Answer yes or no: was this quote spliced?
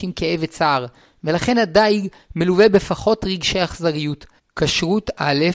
yes